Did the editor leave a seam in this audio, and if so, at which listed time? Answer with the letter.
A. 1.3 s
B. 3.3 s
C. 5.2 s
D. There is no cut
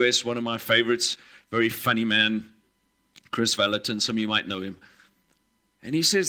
D